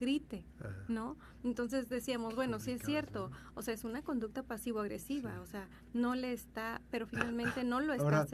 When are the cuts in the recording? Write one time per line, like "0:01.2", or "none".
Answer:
none